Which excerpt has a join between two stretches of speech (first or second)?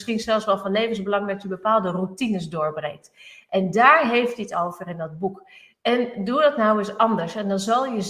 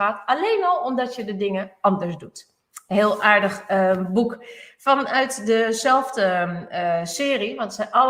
first